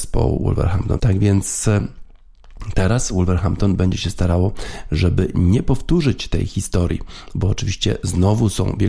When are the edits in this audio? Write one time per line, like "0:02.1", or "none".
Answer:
0:01.0